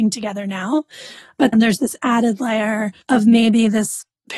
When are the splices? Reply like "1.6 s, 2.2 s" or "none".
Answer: 1.5 s, 3.0 s